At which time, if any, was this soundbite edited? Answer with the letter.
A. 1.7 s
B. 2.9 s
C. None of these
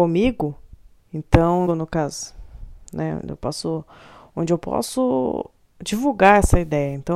A